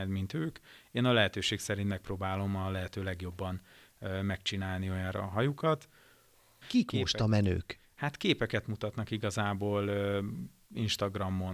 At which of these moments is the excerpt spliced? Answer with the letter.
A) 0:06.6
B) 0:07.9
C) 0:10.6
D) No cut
A